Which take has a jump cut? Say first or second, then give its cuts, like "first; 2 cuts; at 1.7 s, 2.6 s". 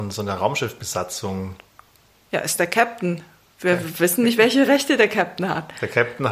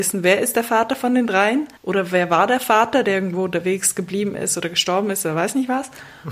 second; 1 cut; at 1.8 s